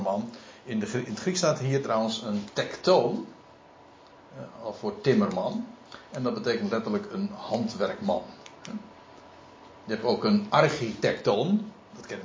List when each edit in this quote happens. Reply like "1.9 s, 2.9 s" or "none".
none